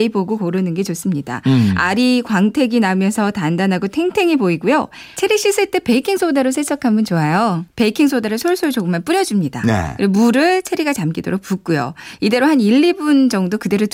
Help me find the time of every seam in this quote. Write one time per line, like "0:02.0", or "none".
0:05.1
0:07.7